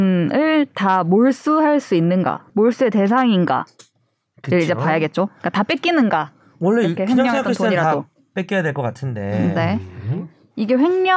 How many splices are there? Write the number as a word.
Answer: one